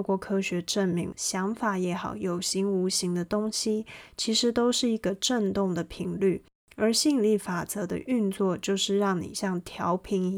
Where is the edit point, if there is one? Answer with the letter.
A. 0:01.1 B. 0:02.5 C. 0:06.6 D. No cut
A